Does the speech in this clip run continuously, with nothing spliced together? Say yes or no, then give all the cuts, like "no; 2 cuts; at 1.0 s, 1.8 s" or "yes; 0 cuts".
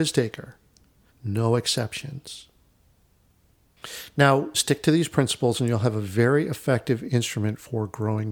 no; 2 cuts; at 1.1 s, 4.5 s